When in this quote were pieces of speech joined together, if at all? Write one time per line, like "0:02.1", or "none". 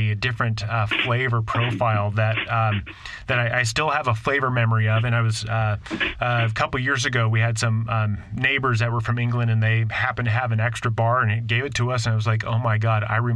none